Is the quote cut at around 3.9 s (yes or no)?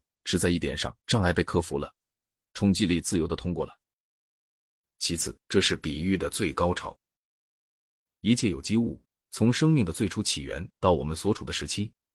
no